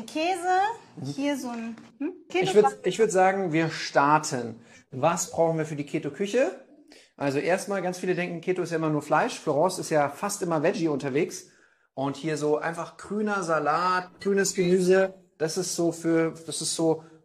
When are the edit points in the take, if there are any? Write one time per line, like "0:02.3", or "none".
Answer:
0:02.3